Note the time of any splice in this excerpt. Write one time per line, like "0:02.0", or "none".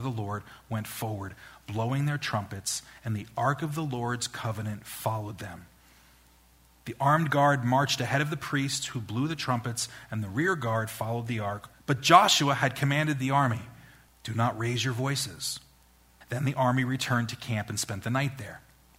0:11.7
0:14.1
0:16.2

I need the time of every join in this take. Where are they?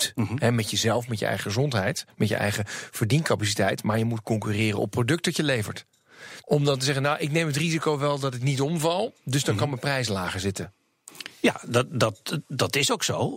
0:06.4

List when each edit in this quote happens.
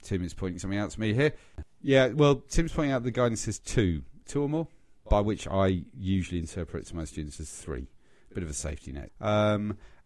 0:05.1
0:09.1

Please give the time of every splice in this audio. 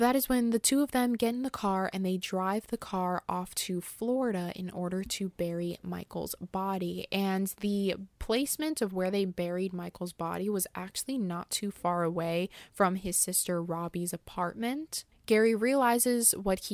0:15.1

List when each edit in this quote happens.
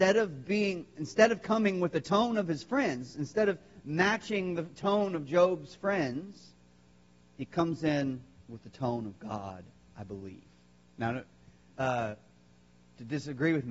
0:11.7

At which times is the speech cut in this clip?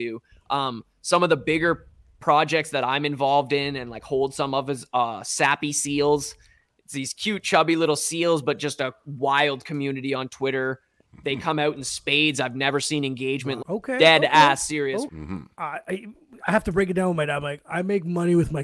0:13.6
0:15.1

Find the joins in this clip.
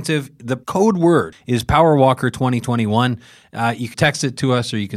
0:01.3
0:03.9

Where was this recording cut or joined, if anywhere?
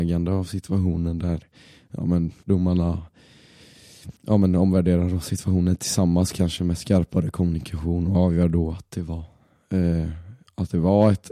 0:02.4
0:04.2

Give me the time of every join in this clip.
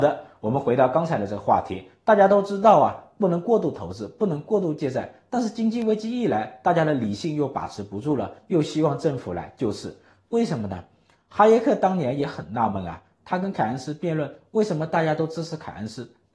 none

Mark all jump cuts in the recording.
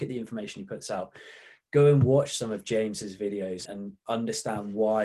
0:03.6

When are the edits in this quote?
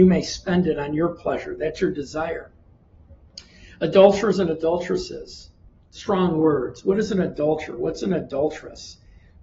none

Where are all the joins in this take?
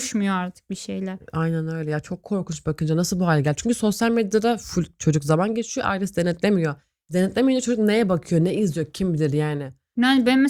none

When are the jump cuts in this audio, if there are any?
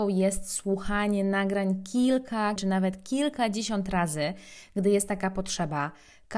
0:02.6

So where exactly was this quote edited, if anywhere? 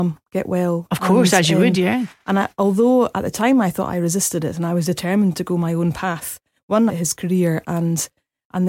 0:06.9

